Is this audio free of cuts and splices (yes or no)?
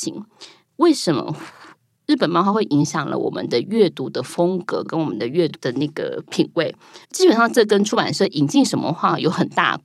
no